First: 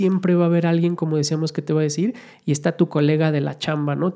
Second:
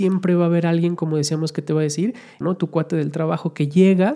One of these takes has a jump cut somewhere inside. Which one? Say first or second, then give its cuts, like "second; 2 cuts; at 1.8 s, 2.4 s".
second; 1 cut; at 2.4 s